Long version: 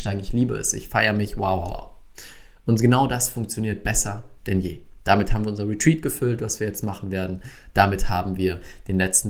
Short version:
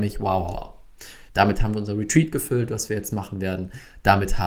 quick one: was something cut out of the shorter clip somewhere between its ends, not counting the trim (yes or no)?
yes